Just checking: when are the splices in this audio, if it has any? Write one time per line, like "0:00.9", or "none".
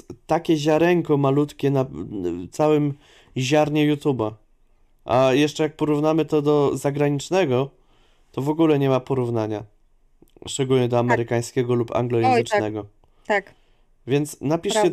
none